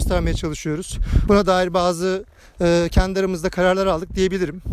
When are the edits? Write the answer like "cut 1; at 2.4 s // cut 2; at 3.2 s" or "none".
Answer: cut 1; at 1.3 s